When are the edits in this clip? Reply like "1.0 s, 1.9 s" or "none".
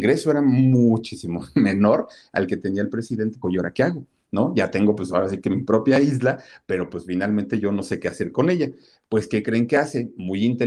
3.4 s